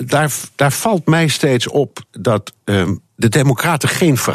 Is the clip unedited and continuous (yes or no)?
no